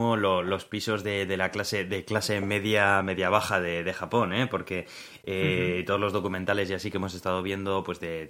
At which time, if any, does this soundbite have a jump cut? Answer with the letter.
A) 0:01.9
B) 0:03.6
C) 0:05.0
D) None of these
D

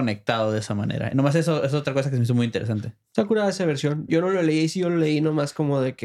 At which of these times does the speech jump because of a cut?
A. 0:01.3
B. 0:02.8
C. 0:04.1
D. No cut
C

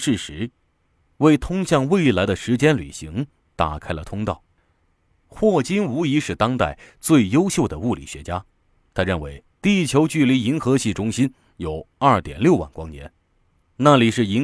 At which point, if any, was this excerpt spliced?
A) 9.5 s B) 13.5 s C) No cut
A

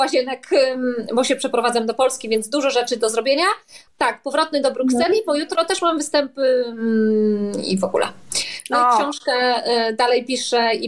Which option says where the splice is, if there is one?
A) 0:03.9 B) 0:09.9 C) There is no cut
A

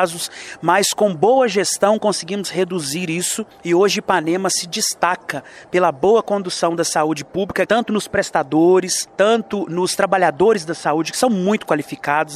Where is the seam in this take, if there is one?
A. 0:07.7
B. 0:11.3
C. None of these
A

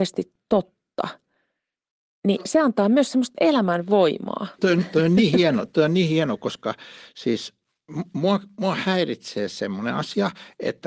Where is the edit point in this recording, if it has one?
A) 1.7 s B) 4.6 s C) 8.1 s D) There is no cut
B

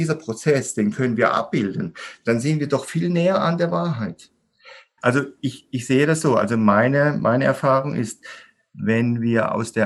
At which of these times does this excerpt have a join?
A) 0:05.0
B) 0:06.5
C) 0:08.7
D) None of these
A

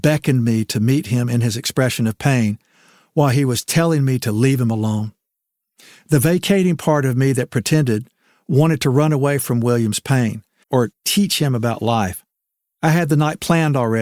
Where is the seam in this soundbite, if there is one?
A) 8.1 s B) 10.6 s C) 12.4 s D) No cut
B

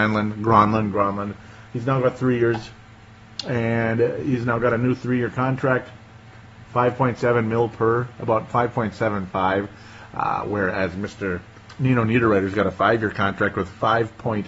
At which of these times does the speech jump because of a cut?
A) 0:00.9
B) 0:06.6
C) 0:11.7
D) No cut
A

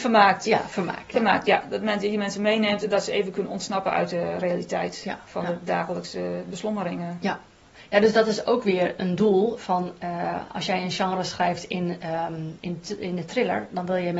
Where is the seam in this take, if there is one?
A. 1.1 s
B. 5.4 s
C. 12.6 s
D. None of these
D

